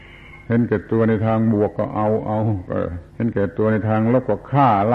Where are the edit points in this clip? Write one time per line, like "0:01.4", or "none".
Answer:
0:03.1